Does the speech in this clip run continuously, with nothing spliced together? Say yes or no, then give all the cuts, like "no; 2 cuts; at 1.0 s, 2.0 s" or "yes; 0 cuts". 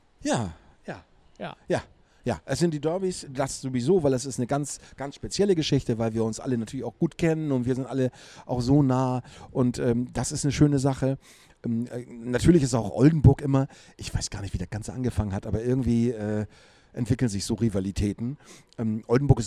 no; 1 cut; at 3.2 s